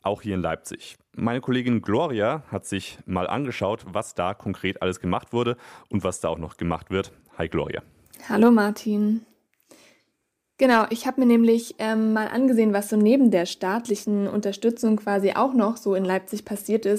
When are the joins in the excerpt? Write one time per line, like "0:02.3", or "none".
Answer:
none